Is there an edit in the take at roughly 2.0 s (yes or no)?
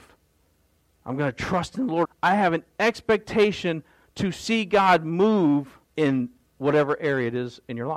yes